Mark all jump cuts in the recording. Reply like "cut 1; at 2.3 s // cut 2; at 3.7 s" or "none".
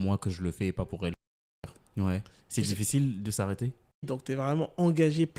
cut 1; at 1.8 s // cut 2; at 4.0 s